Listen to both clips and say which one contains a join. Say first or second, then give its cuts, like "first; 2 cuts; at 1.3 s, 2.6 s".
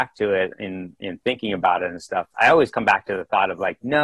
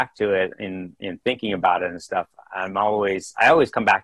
first; 1 cut; at 2.3 s